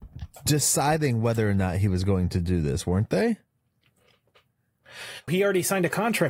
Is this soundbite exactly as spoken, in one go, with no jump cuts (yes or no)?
no